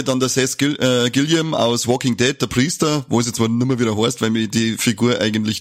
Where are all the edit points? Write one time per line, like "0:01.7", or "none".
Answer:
none